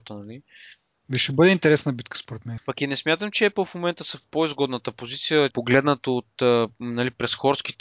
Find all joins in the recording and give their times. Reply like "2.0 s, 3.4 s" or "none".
2.6 s, 5.5 s